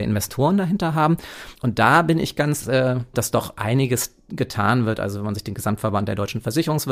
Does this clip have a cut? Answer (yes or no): yes